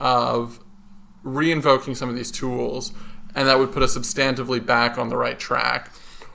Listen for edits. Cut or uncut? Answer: uncut